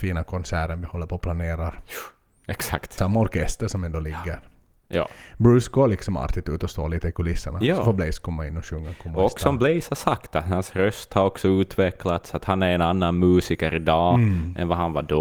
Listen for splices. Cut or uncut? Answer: cut